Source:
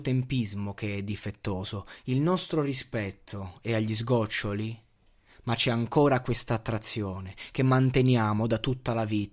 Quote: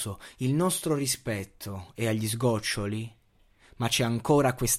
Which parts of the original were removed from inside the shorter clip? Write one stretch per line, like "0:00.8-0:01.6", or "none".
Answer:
none